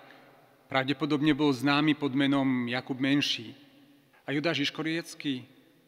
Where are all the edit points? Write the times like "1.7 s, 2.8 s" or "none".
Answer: 4.1 s